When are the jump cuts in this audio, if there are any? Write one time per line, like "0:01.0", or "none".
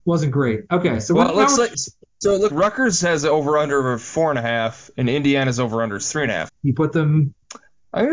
0:02.5
0:06.5